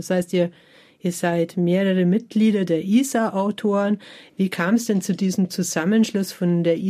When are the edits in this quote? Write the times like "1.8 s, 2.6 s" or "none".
none